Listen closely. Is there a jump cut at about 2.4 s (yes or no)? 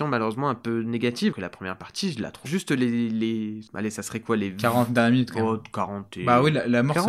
yes